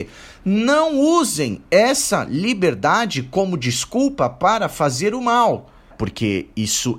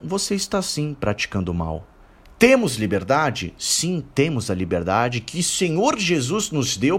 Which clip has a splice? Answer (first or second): first